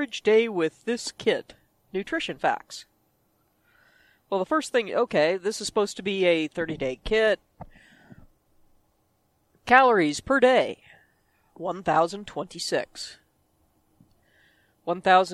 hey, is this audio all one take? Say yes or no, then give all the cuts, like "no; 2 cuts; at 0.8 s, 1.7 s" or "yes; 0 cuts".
yes; 0 cuts